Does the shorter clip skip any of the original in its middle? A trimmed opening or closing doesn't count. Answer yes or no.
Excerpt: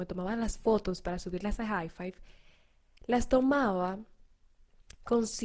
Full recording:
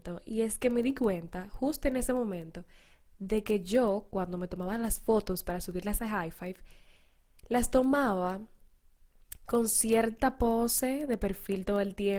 no